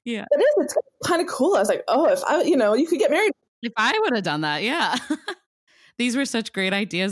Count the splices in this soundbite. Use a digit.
0